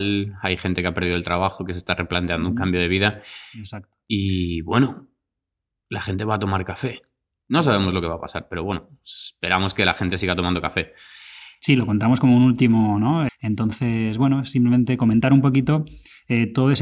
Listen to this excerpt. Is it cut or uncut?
cut